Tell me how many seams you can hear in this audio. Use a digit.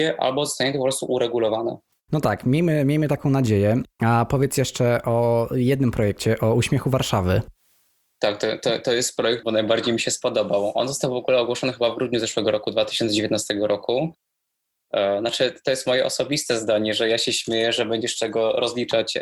2